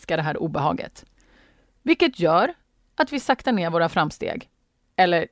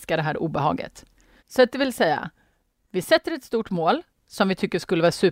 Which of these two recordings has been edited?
second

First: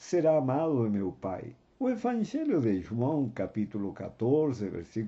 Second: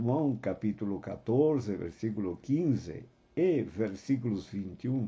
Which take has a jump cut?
first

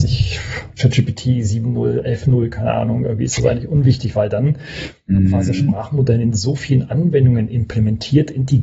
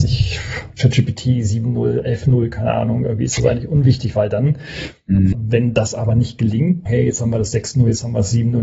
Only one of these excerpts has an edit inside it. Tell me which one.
second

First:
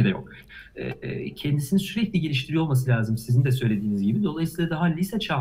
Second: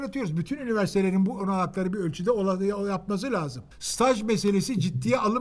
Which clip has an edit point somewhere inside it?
second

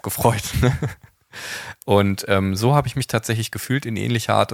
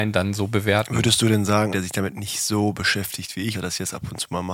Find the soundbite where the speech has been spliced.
second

